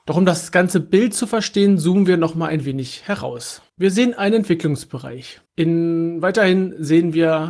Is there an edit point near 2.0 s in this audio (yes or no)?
no